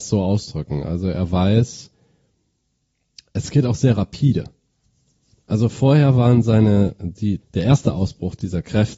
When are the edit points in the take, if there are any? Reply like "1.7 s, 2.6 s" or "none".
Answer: 7.4 s